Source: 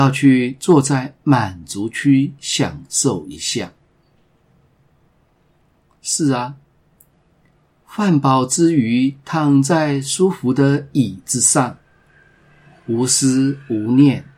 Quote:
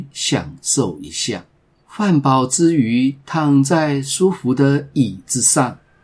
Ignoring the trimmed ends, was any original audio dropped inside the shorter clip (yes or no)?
yes